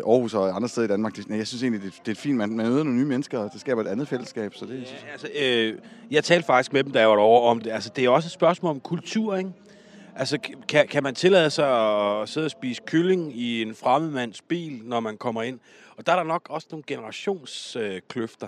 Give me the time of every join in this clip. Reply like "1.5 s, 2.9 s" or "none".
none